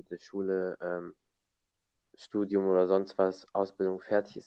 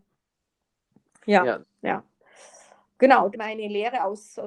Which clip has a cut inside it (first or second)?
second